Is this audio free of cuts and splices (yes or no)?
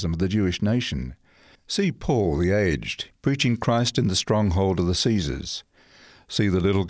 no